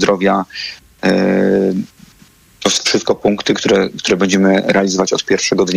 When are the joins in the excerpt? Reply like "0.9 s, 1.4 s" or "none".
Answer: none